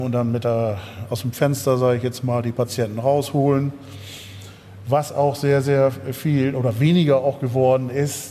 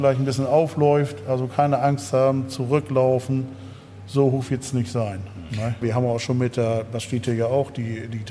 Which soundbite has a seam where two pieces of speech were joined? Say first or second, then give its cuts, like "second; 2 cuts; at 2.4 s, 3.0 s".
second; 1 cut; at 5.8 s